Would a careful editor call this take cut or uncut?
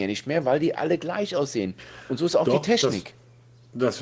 uncut